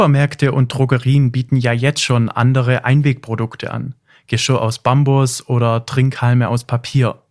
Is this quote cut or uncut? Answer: uncut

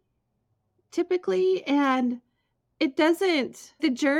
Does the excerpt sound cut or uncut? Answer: uncut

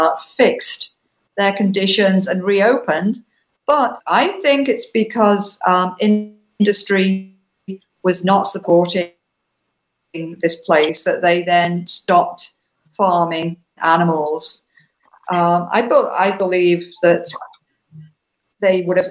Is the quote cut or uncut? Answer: cut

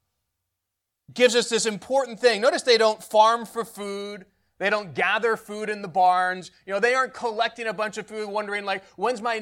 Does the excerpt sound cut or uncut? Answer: uncut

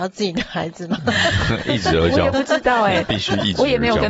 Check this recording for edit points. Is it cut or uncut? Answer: uncut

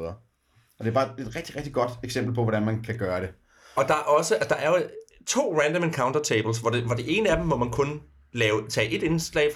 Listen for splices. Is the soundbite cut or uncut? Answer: uncut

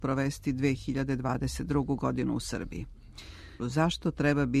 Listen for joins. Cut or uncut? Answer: cut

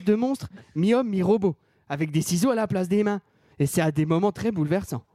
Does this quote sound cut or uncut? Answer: cut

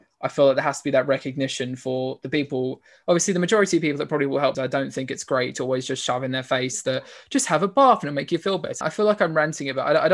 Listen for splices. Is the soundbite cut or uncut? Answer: cut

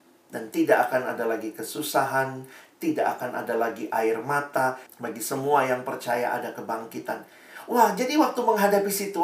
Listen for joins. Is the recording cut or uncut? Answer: cut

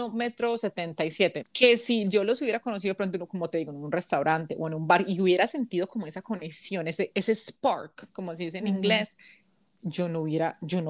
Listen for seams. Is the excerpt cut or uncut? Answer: cut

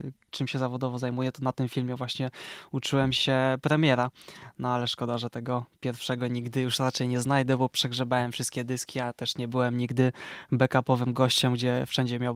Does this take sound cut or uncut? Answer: uncut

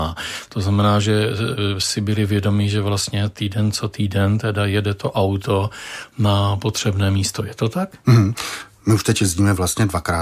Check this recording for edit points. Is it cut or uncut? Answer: uncut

